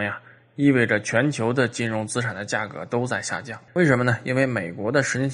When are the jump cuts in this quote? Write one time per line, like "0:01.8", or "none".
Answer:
none